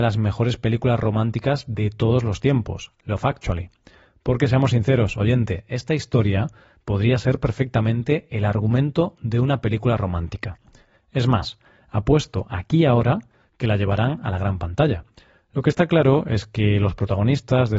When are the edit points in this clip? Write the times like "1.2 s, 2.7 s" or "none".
none

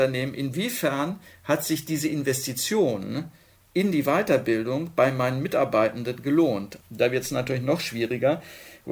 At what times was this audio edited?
6.8 s

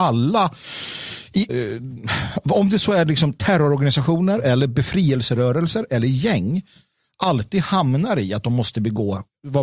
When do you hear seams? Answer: 1.5 s

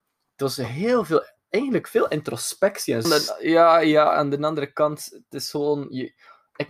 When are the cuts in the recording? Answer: 3.0 s

